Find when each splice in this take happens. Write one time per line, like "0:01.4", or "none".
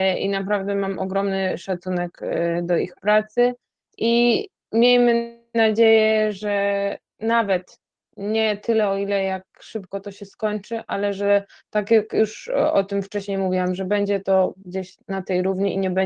none